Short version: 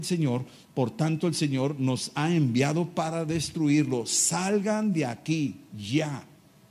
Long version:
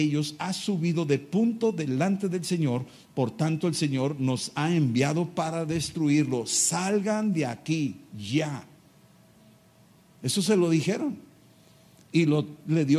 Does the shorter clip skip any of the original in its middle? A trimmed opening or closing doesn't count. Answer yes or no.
no